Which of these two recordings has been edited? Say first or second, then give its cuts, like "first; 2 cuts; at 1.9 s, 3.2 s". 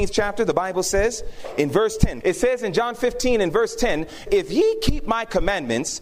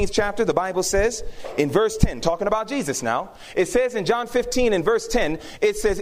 first; 2 cuts; at 2.2 s, 4.3 s